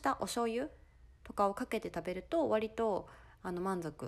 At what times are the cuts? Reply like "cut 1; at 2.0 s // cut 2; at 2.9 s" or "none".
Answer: cut 1; at 1.2 s